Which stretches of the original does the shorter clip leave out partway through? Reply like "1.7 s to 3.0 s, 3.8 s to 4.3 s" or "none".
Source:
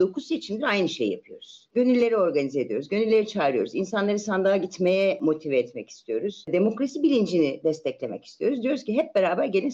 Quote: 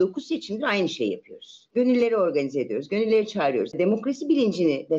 3.7 s to 6.5 s

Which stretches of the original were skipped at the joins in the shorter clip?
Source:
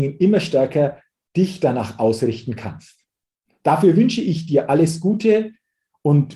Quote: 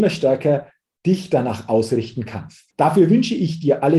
3.0 s to 3.6 s

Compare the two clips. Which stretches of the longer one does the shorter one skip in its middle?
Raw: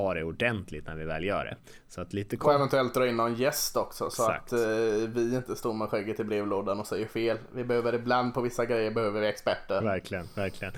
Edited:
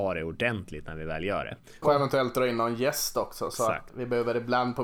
1.8 s to 2.4 s, 4.5 s to 7.5 s

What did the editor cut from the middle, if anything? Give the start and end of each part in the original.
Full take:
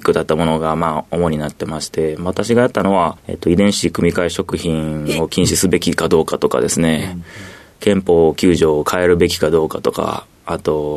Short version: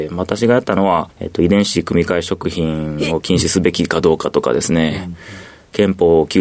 none

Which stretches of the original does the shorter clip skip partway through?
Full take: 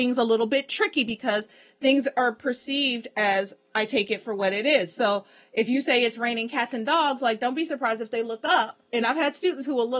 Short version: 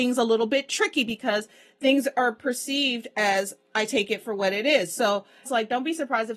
5.5 s to 7.2 s

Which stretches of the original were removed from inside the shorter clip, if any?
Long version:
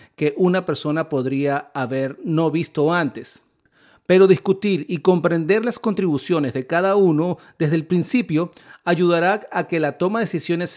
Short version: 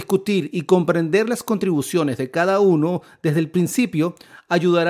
none

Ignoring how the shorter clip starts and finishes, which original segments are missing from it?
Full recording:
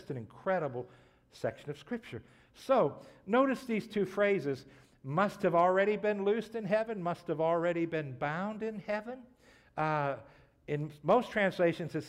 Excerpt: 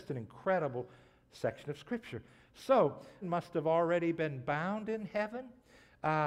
3.2 s to 6.9 s

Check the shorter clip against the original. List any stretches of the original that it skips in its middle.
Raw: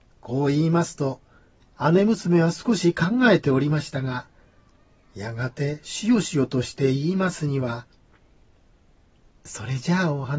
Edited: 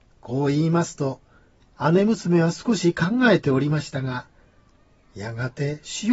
none

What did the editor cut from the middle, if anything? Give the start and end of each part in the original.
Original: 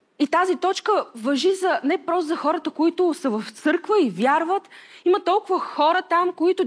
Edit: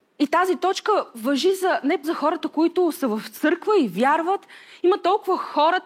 2.0 s to 2.3 s

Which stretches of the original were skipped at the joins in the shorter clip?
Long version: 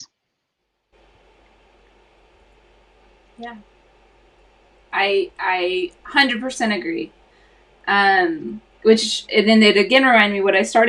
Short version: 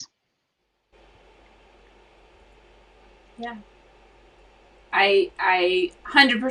none

